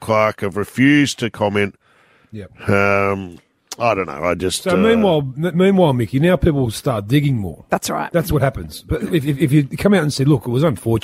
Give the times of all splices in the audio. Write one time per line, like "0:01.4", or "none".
none